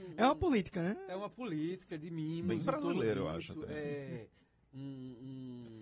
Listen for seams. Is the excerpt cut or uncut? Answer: uncut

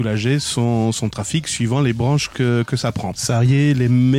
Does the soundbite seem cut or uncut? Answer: cut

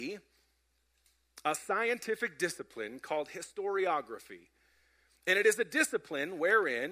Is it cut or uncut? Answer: uncut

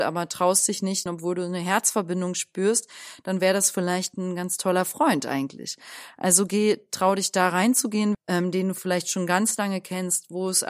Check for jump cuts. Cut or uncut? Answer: cut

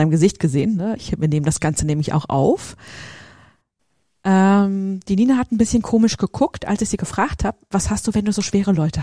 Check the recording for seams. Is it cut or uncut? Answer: cut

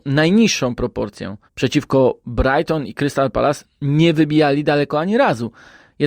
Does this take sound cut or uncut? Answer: cut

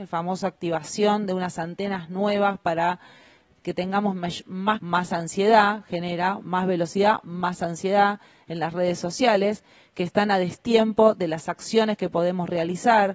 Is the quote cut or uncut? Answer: cut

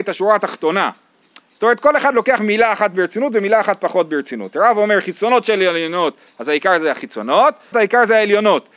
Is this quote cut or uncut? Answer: cut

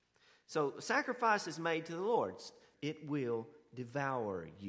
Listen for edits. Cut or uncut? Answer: cut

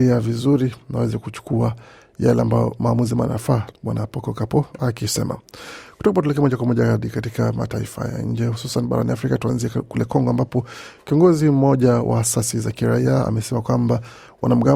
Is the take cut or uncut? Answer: cut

